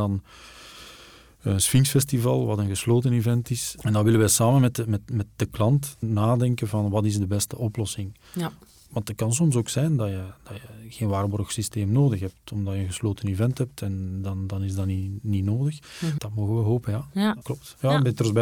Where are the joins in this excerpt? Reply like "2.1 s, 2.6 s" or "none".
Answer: 5.9 s, 16.2 s, 17.4 s